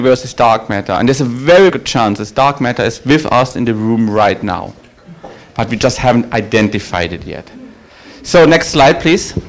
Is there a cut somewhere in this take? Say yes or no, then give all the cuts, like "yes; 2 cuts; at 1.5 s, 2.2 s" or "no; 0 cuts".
yes; 1 cut; at 1.7 s